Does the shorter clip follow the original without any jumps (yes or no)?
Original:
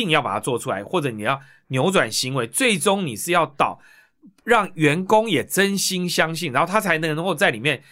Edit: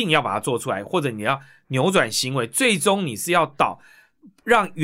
yes